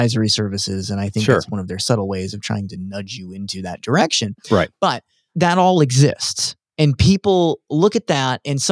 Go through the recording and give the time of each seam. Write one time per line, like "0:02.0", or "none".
none